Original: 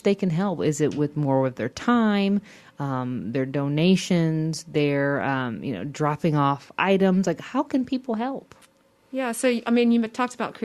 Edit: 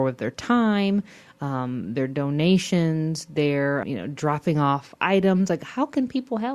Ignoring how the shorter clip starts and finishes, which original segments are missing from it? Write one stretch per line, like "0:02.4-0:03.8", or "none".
0:05.2-0:05.6